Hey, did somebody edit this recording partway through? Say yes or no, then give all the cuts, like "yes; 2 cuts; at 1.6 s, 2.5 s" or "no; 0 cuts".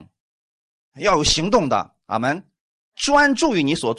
no; 0 cuts